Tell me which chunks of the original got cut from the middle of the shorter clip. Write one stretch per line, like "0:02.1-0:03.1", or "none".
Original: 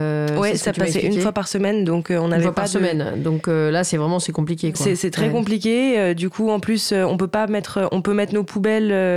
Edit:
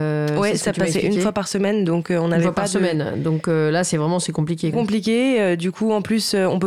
0:04.7-0:05.3